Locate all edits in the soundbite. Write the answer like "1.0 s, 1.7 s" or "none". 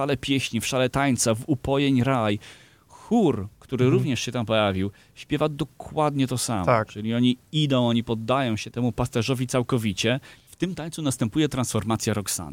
8.7 s, 10.5 s